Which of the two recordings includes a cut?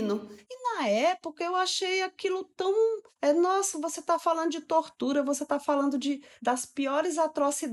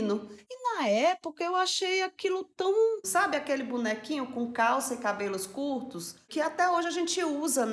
second; 1 cut; at 3.0 s

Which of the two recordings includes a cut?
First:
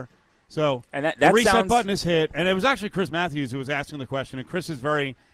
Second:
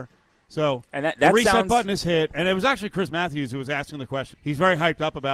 second; 1 cut; at 4.3 s

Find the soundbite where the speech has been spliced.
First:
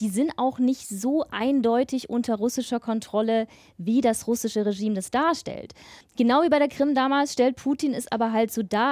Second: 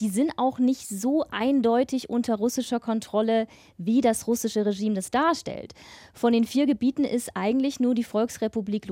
first; 1 cut; at 6.0 s

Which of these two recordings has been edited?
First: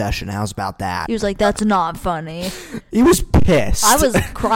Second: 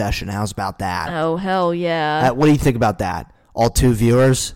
first; 1 cut; at 1.1 s

